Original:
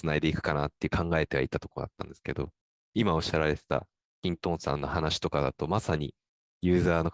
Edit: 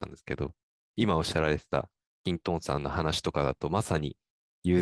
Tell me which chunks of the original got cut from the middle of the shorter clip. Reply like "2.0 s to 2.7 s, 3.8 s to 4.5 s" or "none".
none